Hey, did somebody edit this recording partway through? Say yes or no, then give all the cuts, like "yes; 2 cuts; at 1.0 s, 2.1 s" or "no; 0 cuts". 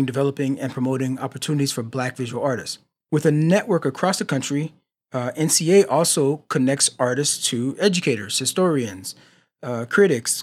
no; 0 cuts